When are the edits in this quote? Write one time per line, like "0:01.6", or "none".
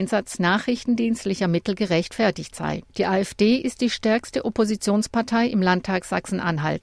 0:02.9